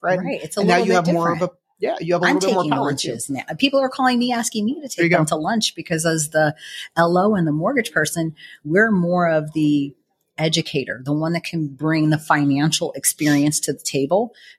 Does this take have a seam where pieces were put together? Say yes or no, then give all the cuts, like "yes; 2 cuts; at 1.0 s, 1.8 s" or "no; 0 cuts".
no; 0 cuts